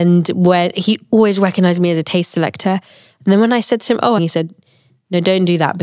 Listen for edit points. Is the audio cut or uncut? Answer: cut